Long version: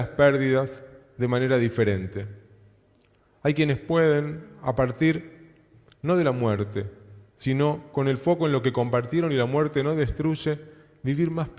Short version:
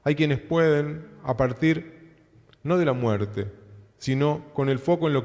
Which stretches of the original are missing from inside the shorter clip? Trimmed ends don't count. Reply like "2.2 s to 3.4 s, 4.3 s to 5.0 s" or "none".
none